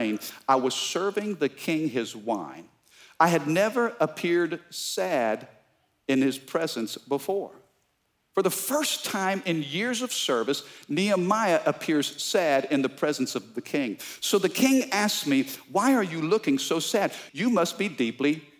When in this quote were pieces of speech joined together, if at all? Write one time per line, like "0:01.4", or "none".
0:17.3